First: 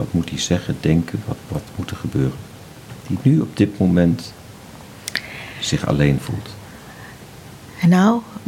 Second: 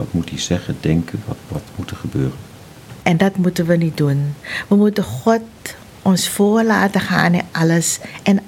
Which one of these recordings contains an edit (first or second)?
second